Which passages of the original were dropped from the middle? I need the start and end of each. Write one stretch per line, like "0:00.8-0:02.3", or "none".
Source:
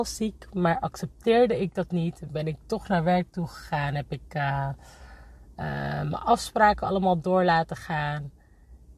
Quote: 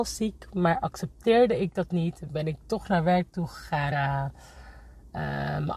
0:03.9-0:04.4